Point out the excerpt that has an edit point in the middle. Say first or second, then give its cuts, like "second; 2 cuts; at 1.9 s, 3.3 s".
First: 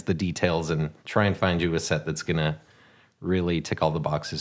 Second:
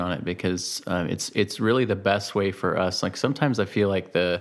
first; 1 cut; at 1.0 s